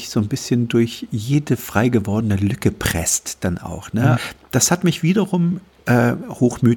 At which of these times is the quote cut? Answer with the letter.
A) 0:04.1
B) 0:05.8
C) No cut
A